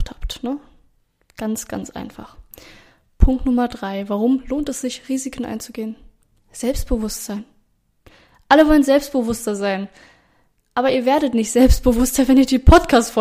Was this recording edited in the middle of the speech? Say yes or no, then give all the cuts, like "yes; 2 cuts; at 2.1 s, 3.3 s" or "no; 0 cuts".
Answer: no; 0 cuts